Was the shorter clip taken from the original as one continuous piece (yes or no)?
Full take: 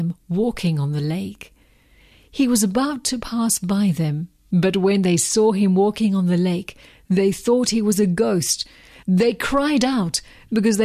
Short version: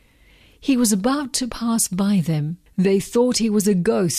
no